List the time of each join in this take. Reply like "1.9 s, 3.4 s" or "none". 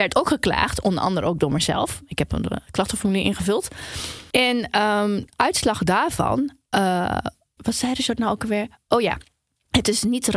7.6 s

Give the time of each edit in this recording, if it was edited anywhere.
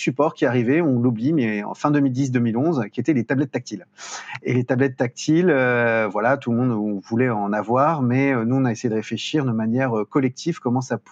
none

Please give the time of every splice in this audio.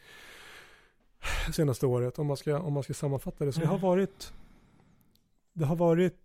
1.5 s, 3.5 s

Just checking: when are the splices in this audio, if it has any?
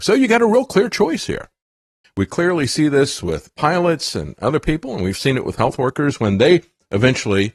2.0 s

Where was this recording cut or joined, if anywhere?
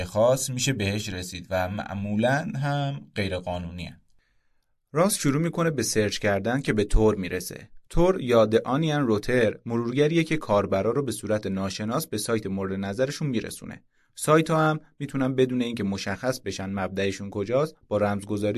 none

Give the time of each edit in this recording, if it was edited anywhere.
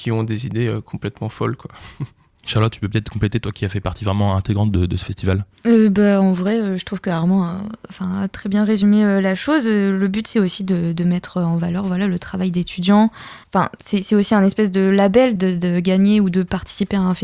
13.4 s, 15.4 s

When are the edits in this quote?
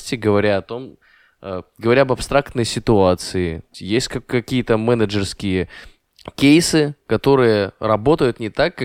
3.7 s

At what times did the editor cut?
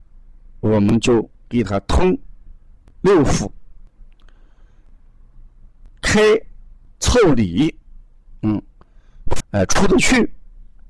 9.4 s

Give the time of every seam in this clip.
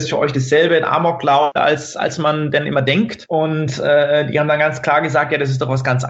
1.6 s

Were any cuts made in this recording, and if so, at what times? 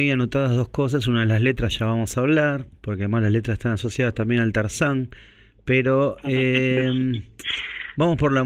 none

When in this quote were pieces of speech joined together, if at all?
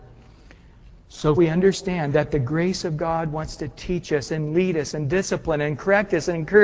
1.4 s

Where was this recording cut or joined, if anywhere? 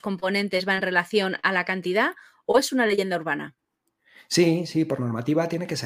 none

